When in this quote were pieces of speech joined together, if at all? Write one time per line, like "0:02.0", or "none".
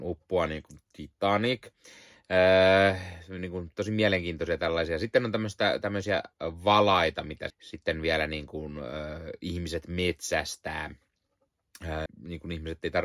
0:07.5
0:12.1

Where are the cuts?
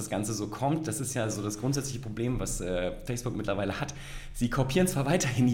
none

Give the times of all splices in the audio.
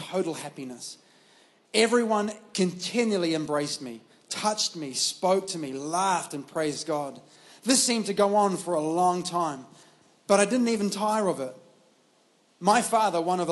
none

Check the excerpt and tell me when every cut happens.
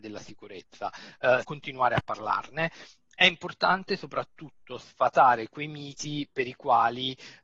0:01.4

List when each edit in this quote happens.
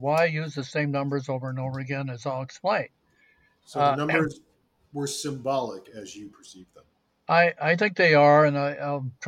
none

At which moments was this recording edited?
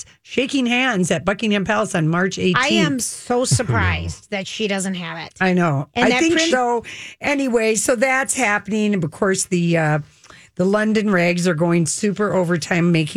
0:06.5

